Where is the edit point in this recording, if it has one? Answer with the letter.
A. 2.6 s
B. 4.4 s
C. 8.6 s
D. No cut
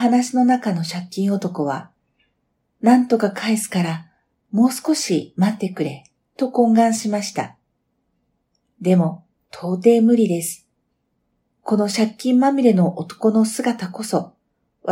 C